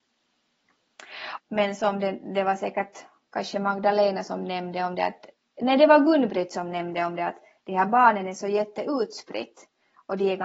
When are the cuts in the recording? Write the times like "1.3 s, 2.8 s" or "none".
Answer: 1.4 s